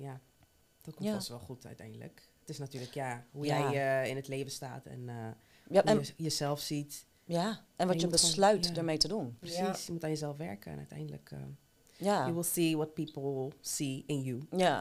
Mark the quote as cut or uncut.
uncut